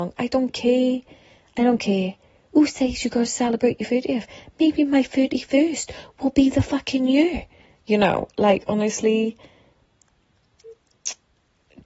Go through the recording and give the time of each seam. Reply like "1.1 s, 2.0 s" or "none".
none